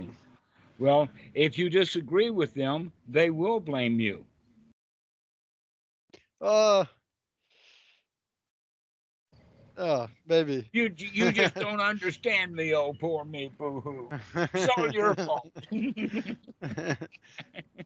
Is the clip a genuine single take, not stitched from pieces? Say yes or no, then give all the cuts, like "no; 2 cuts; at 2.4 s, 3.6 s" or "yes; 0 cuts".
yes; 0 cuts